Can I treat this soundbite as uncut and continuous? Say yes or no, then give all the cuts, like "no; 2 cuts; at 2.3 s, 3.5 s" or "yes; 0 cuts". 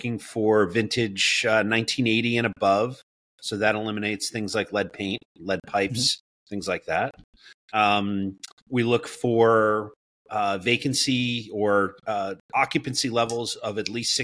yes; 0 cuts